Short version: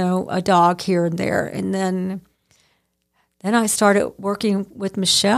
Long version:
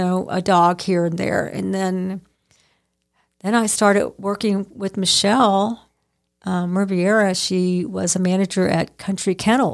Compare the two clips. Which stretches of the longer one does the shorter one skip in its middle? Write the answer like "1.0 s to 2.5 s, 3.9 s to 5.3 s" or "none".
none